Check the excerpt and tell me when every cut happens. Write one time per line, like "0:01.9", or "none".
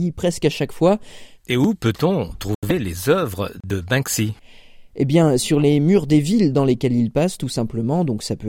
0:01.4